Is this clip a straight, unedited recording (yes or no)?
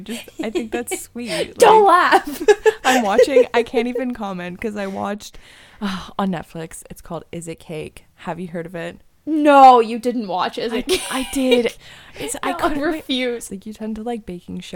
no